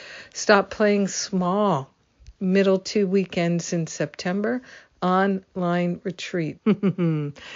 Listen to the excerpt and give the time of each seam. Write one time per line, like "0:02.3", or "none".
0:06.6